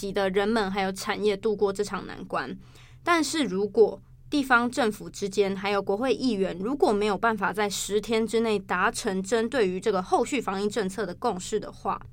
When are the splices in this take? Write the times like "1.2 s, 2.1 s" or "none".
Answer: none